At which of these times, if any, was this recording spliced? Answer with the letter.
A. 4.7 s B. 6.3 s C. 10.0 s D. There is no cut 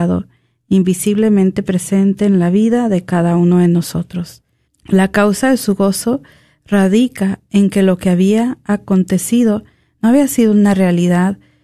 A